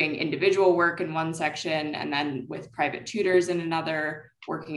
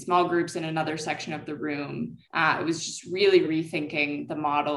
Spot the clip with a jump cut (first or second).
second